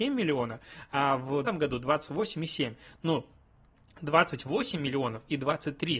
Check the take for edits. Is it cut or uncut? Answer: cut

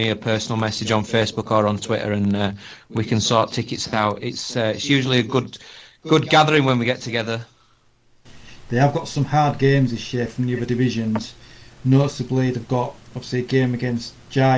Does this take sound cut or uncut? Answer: cut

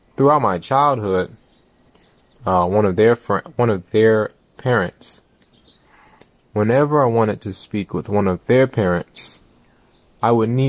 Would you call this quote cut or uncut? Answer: cut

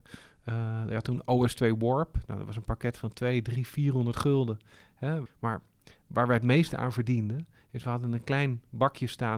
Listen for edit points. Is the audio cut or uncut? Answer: cut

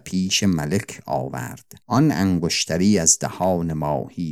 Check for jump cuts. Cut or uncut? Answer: cut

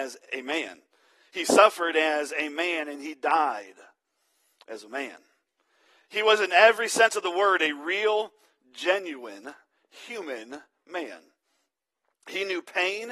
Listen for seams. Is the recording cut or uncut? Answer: uncut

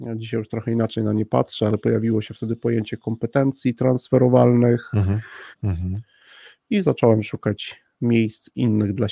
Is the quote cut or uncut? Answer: cut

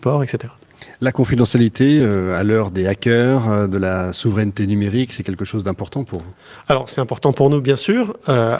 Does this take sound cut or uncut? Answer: uncut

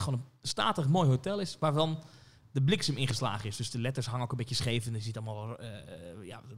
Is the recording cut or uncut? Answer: uncut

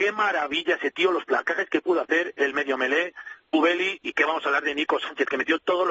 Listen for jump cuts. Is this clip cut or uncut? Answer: uncut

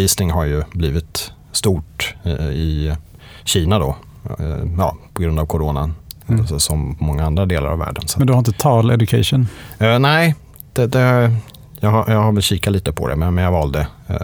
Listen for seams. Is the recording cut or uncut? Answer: uncut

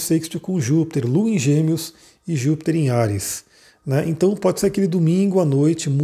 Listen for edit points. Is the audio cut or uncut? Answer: uncut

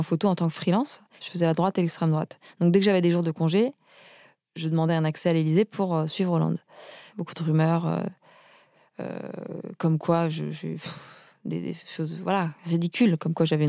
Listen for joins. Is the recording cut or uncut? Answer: cut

